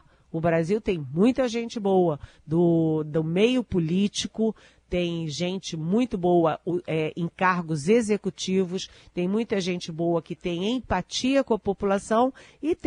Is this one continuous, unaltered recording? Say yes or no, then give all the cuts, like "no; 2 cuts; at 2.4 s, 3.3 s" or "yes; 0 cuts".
yes; 0 cuts